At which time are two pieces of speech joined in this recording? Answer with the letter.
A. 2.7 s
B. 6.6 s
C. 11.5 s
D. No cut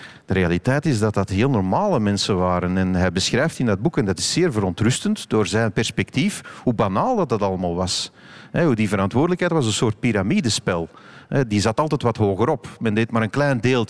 D